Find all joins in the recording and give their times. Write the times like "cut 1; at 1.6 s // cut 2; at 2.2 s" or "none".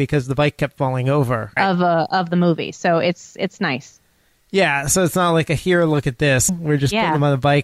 cut 1; at 1.6 s // cut 2; at 6.5 s